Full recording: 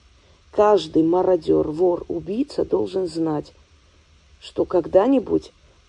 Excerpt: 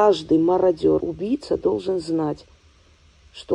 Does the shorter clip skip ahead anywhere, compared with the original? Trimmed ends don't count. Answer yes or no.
yes